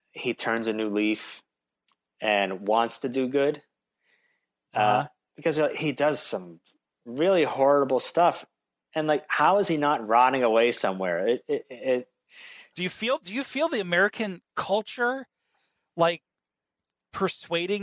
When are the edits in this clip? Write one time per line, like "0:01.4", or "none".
0:12.7